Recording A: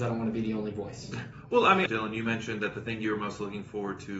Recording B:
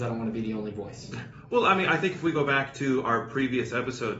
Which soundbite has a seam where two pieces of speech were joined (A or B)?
A